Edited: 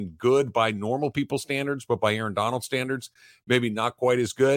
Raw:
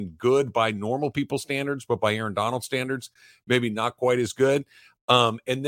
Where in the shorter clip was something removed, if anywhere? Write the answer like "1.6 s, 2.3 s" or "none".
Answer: none